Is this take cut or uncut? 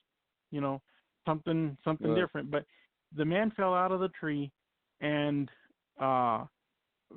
uncut